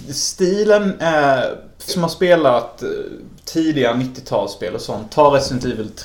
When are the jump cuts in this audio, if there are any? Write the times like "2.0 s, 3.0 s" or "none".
1.9 s